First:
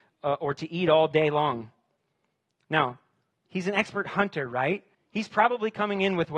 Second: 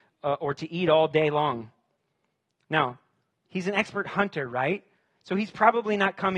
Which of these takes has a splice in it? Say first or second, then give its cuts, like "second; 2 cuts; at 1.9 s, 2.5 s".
first; 1 cut; at 4.9 s